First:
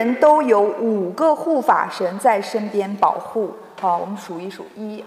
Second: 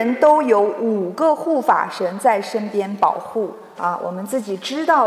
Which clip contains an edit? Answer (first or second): second